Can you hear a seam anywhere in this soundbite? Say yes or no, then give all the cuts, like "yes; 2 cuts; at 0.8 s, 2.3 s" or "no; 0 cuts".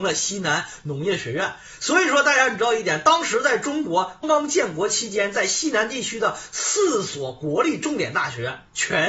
yes; 1 cut; at 4.2 s